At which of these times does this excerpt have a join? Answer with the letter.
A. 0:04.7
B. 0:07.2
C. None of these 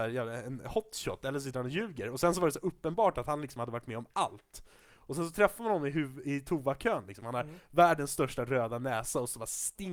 B